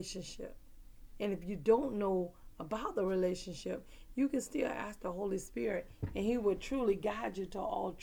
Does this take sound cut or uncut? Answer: cut